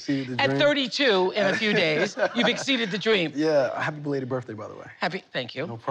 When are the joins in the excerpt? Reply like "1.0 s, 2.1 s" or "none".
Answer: none